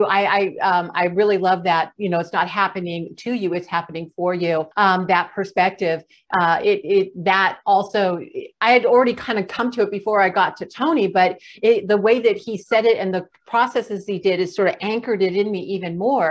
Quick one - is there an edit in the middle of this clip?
yes; 1 cut; at 4.7 s

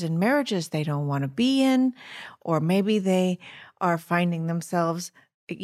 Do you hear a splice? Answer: no; 0 cuts

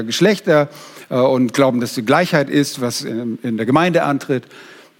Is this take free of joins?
yes; 0 cuts

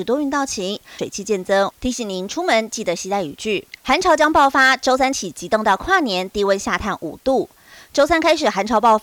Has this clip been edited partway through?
yes; 2 cuts; at 1.0 s, 3.8 s

